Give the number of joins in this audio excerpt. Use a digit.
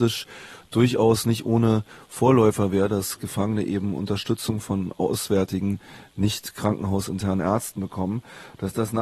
0